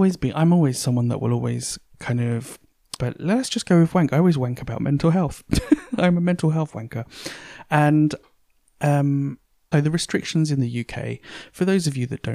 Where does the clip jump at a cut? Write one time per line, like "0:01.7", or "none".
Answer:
0:03.0
0:09.7